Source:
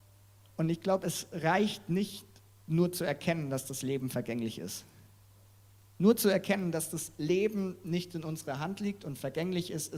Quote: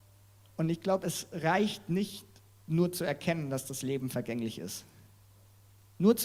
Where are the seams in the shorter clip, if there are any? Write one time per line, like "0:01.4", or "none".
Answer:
none